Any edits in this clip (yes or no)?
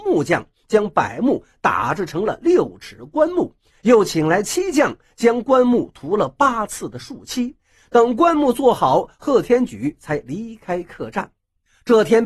no